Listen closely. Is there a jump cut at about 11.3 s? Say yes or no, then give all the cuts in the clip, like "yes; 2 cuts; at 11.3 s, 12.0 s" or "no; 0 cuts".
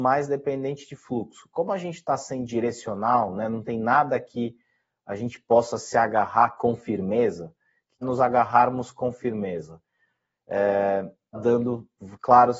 yes; 2 cuts; at 8.0 s, 11.3 s